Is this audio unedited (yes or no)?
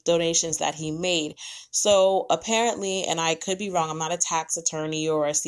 yes